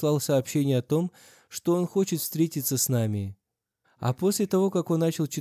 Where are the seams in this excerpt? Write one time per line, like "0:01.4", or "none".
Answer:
0:03.8

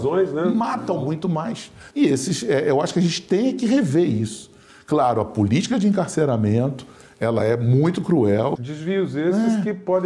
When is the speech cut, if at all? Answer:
0:01.9
0:08.6

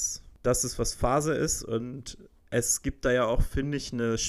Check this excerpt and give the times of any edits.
none

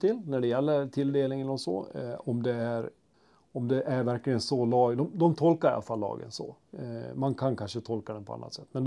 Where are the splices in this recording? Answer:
none

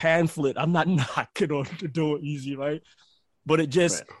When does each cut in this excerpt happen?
none

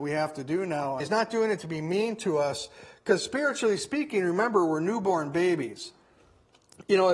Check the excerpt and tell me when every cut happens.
0:01.0

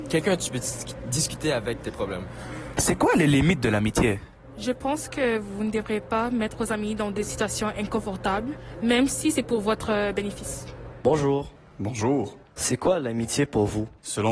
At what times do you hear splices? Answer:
0:12.5

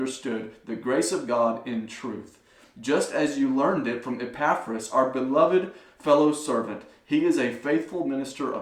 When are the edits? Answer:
none

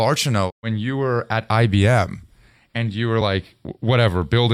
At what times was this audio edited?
none

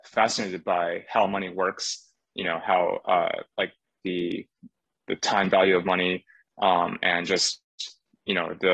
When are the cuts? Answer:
none

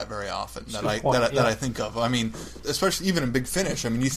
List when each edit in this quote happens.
0:02.6

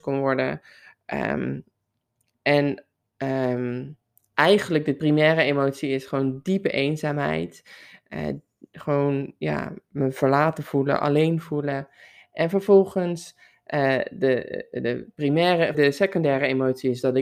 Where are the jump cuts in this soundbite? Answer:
0:15.7

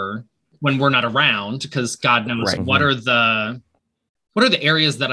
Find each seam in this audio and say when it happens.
0:02.6

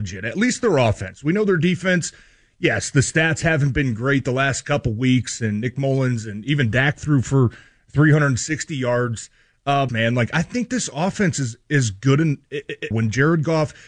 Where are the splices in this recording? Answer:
0:09.9
0:12.9

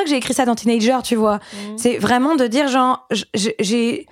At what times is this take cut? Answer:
none

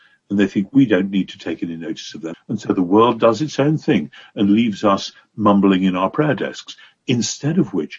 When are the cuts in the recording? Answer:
0:02.3

